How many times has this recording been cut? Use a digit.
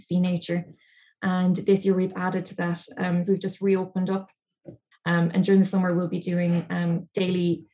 2